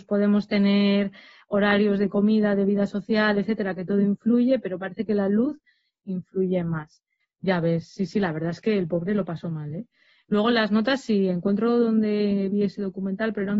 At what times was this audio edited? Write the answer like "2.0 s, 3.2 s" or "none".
7.2 s